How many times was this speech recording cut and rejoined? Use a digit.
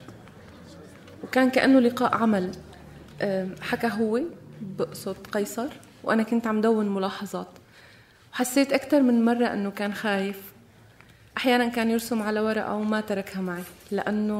0